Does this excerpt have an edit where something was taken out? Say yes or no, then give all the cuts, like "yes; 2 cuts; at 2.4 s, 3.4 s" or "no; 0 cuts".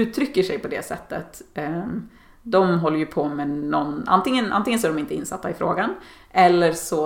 no; 0 cuts